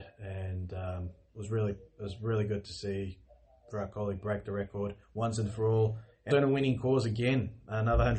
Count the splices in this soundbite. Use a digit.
2